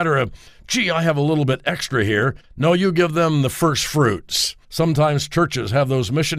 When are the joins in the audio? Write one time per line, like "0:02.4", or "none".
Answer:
0:02.4
0:04.6